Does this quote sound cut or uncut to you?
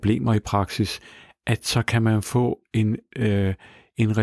uncut